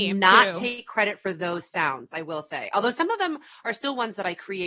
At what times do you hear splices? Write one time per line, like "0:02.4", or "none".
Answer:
none